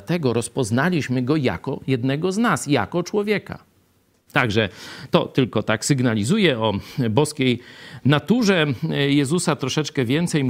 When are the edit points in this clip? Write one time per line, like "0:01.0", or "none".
0:04.3